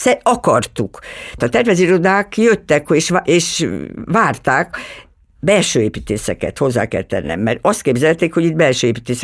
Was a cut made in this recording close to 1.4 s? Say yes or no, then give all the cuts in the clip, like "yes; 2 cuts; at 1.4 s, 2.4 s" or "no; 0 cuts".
yes; 1 cut; at 1.4 s